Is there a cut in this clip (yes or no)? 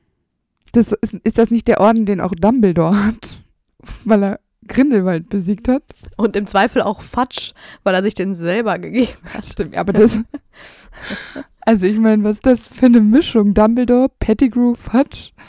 no